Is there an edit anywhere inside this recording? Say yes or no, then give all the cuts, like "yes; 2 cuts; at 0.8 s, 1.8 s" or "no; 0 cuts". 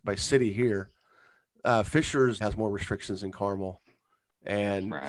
yes; 1 cut; at 2.4 s